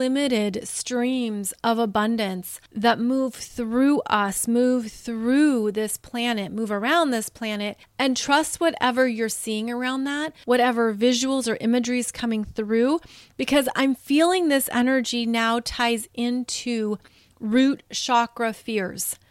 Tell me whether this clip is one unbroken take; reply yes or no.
yes